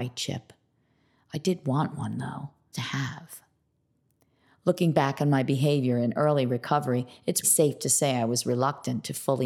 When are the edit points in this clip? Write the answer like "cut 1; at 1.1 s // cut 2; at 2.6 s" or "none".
cut 1; at 2.7 s // cut 2; at 7.4 s